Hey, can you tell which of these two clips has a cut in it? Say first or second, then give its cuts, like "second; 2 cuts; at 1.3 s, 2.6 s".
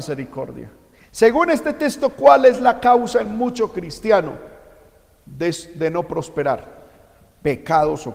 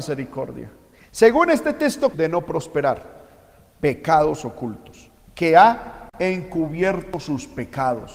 second; 1 cut; at 2.1 s